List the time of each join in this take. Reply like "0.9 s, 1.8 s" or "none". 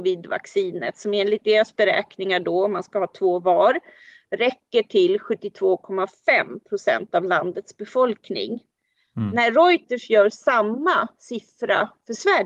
none